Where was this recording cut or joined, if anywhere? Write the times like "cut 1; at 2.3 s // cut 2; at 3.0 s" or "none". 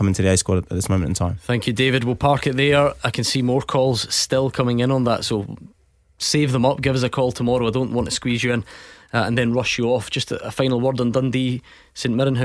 none